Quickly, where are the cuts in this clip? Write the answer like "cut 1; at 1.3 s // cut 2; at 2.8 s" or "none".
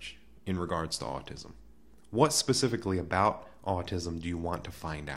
none